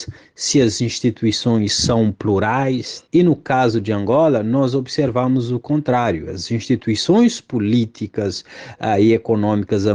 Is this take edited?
yes; 1 cut; at 3.1 s

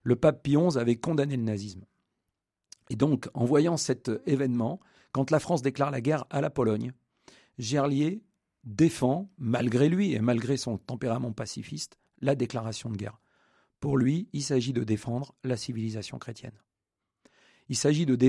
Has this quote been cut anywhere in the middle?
no; 0 cuts

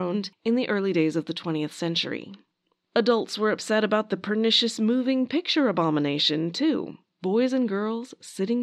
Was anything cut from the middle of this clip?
no; 0 cuts

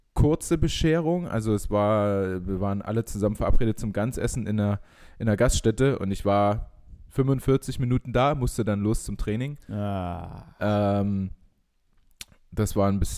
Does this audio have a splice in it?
yes; 1 cut; at 7.1 s

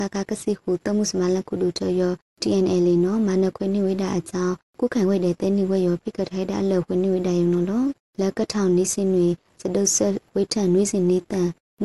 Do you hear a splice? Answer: no; 0 cuts

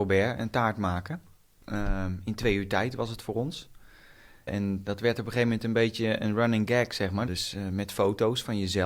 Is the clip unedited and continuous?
no; 2 cuts; at 4.5 s, 7.3 s

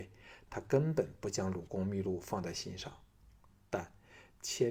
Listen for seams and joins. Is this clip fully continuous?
yes; 0 cuts

